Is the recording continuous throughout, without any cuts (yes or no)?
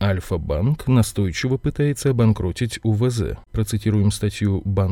no